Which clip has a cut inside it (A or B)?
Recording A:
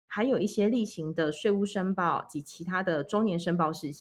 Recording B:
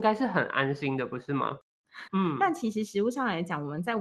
B